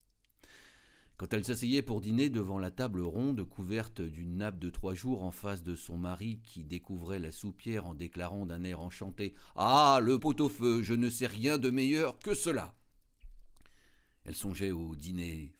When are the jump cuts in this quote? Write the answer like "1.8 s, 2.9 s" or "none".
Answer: 10.2 s